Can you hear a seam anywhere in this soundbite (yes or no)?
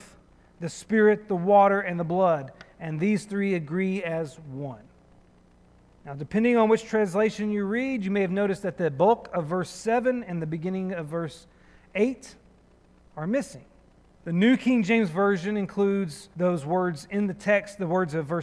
yes